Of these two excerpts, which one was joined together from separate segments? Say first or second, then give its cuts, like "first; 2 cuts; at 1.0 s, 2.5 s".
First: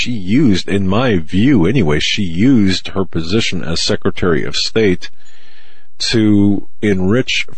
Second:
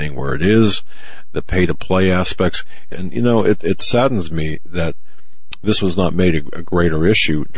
second; 1 cut; at 2.9 s